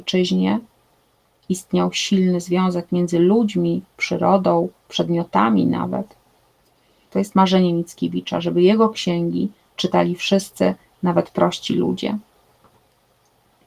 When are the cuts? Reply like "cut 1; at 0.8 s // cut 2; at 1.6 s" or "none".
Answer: cut 1; at 7.1 s